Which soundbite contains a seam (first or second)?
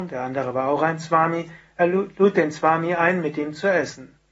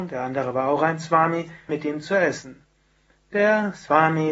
second